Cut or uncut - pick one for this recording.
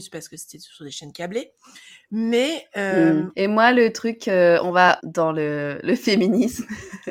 cut